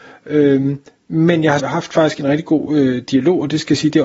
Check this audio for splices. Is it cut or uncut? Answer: cut